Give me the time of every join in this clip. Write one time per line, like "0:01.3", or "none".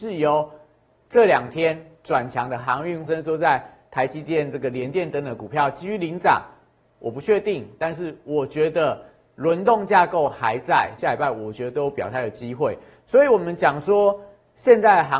0:03.1
0:11.0